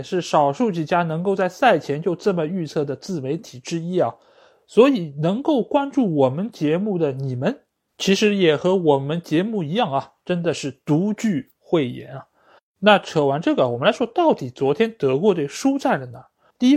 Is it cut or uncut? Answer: cut